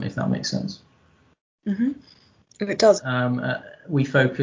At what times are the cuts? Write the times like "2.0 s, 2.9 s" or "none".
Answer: 3.0 s